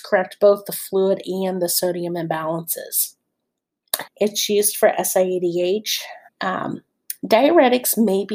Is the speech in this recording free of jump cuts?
no; 2 cuts; at 4.1 s, 6.3 s

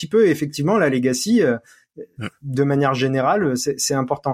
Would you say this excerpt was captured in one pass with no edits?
yes; 0 cuts

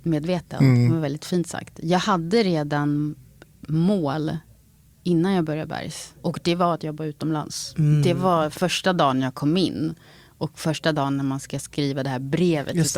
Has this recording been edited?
no; 0 cuts

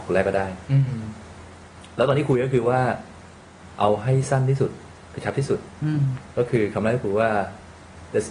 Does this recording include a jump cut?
no; 0 cuts

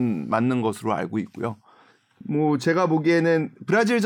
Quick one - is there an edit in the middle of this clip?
no; 0 cuts

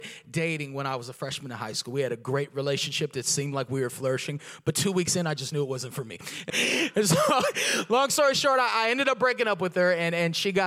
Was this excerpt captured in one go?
no; 1 cut; at 6.5 s

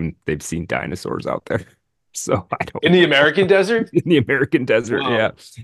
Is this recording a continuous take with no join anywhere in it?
yes; 0 cuts

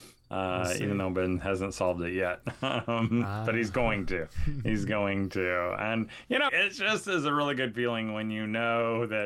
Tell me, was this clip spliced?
yes; 1 cut; at 6.5 s

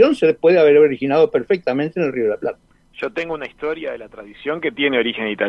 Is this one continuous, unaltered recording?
yes; 0 cuts

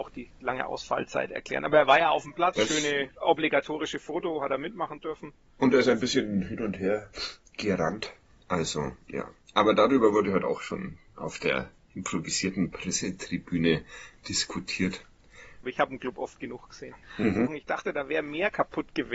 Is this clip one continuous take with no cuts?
no; 3 cuts; at 2.5 s, 15.6 s, 17.5 s

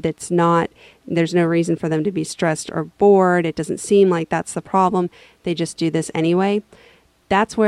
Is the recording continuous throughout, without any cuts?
yes; 0 cuts

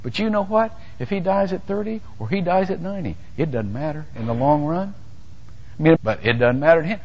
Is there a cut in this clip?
yes; 1 cut; at 6.0 s

